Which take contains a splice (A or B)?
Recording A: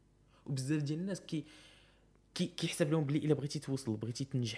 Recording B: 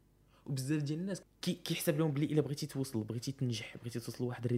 B